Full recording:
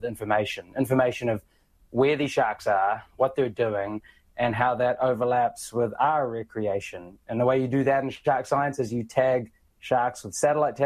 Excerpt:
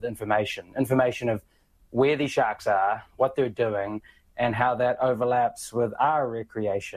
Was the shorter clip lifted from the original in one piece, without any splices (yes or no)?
yes